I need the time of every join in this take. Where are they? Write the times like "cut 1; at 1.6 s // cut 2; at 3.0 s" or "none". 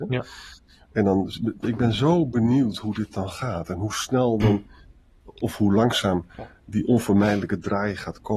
cut 1; at 1.6 s